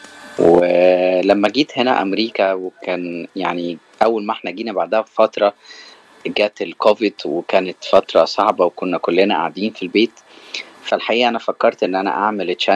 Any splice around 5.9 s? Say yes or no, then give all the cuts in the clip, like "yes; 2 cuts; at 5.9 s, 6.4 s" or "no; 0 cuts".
no; 0 cuts